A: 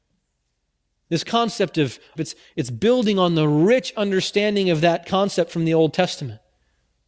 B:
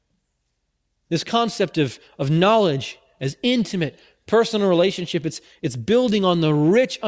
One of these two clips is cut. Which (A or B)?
A